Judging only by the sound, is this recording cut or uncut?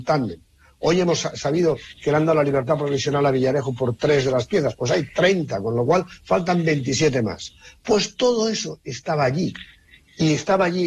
uncut